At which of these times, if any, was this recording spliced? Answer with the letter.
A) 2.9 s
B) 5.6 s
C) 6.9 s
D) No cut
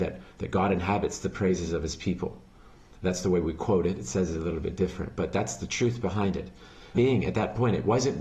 C